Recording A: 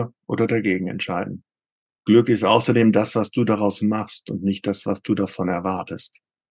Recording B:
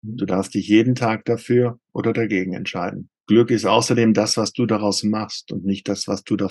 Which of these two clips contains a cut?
B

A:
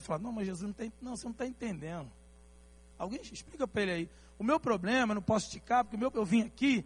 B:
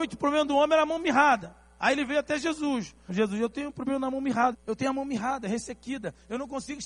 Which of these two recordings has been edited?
B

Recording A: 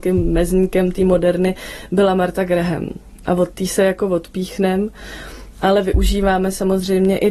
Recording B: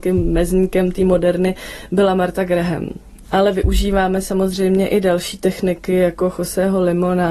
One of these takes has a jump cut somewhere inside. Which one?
B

